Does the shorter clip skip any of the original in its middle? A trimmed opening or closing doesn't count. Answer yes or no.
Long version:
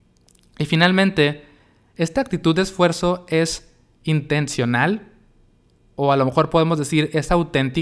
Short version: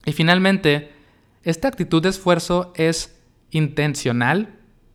no